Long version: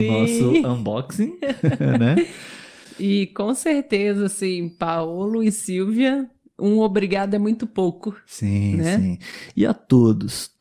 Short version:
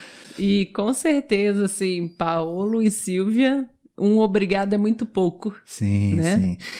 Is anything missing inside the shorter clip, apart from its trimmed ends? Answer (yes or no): no